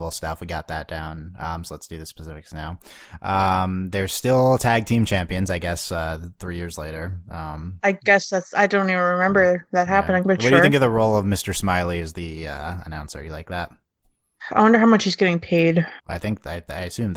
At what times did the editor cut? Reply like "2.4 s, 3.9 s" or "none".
16.0 s